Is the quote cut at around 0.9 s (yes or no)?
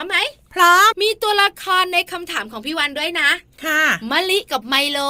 yes